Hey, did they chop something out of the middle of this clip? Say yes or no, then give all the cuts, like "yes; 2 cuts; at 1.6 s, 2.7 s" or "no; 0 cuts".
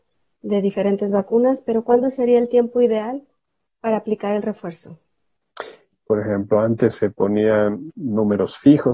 yes; 2 cuts; at 6.0 s, 7.9 s